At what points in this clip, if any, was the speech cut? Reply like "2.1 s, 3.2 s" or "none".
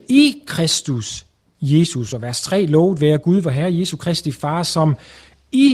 none